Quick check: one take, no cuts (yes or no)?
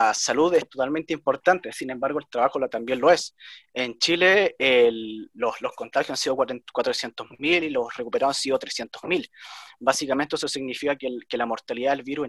yes